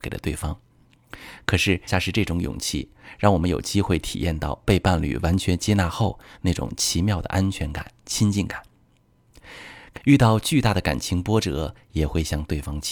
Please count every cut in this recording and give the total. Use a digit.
2